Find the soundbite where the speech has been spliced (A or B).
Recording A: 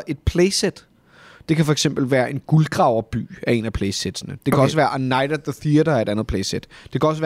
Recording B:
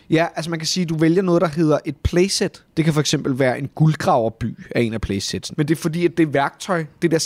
B